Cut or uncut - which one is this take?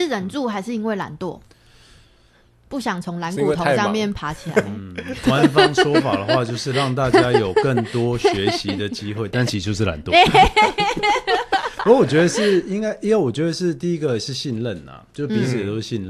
uncut